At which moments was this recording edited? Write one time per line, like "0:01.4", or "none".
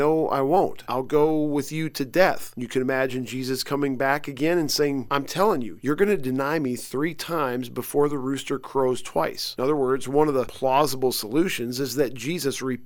0:05.1